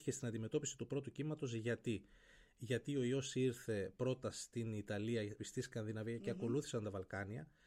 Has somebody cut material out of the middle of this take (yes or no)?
yes